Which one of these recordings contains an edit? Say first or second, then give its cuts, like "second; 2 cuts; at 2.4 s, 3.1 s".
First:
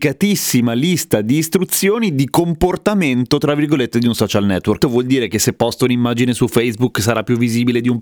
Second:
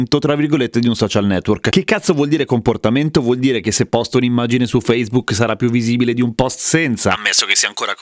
first; 1 cut; at 4.8 s